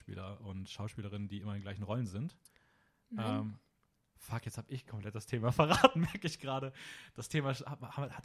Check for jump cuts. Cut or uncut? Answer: uncut